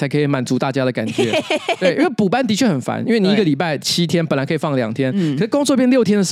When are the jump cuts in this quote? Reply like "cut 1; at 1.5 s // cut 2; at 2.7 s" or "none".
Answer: none